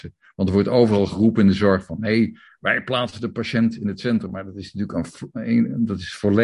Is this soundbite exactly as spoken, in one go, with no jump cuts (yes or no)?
yes